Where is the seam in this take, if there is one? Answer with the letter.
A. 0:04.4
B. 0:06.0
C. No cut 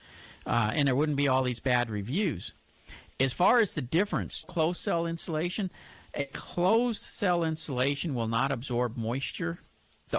A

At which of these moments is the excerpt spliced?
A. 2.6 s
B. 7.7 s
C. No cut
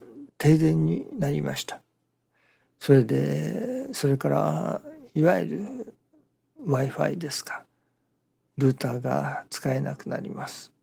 A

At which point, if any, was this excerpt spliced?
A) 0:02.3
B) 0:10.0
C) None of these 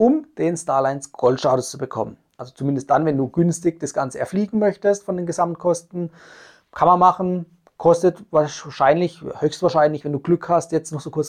A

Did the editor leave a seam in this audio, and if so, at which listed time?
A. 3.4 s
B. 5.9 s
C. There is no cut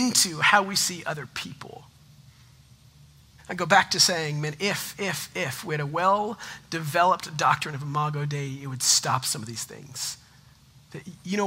A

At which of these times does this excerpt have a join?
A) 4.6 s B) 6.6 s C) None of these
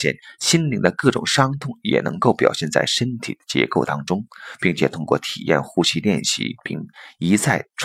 B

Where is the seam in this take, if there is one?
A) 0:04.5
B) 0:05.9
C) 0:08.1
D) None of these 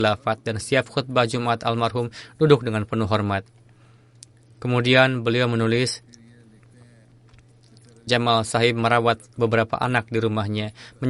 C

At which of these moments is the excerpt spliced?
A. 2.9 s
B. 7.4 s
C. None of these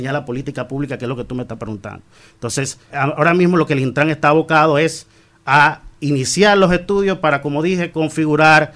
A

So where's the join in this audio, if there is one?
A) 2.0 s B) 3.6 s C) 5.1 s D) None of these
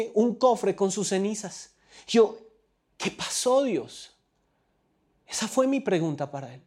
D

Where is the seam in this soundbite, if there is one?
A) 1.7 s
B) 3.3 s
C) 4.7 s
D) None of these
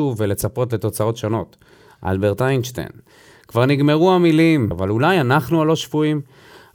C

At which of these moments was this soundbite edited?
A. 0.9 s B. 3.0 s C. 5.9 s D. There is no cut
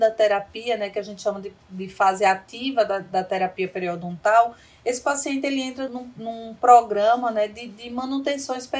C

